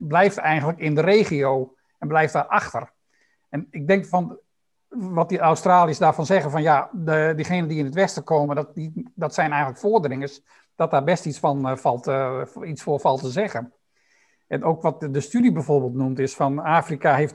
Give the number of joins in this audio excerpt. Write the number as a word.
zero